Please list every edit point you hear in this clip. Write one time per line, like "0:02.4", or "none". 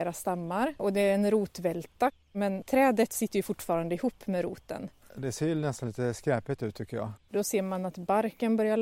0:05.0
0:07.3